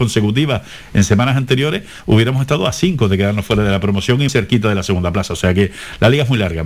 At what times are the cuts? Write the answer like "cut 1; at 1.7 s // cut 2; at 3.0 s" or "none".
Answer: cut 1; at 4.3 s